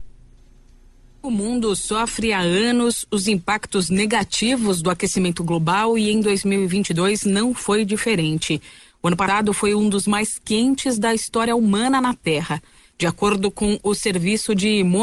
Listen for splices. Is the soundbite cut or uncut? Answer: uncut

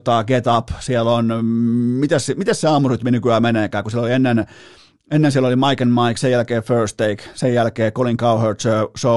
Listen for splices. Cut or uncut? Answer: uncut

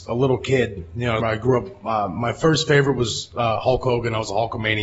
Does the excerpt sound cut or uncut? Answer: cut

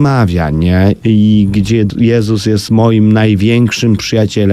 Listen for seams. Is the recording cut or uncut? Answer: uncut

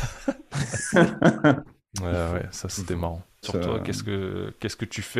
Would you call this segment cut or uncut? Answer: cut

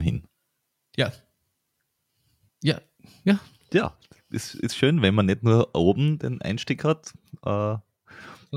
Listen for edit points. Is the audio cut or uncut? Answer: uncut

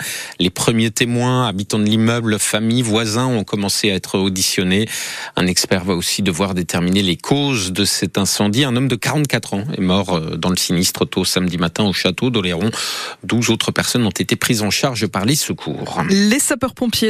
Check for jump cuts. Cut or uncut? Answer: uncut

